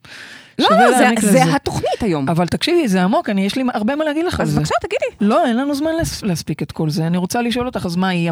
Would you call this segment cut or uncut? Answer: uncut